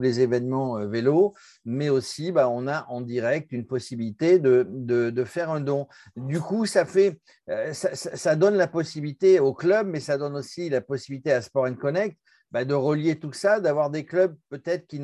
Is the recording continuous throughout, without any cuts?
yes; 0 cuts

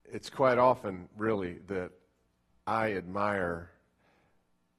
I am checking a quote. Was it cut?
no; 0 cuts

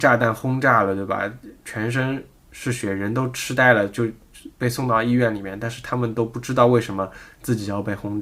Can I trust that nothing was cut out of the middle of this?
yes; 0 cuts

